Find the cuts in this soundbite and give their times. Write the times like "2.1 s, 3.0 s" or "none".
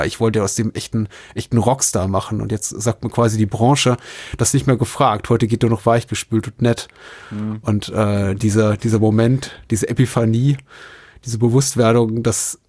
none